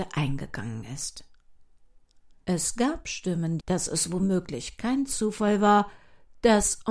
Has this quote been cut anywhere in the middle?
yes; 2 cuts; at 2.4 s, 3.6 s

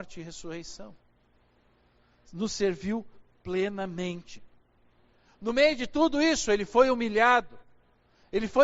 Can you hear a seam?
no; 0 cuts

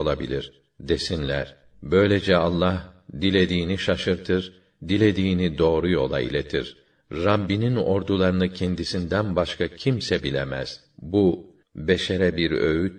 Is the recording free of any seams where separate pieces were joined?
no; 1 cut; at 11.6 s

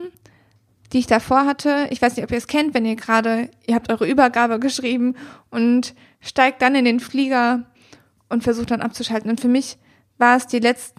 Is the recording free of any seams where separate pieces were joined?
yes; 0 cuts

